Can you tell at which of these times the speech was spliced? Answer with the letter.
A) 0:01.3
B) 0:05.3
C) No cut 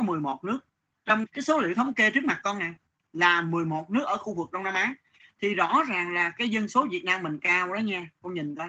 A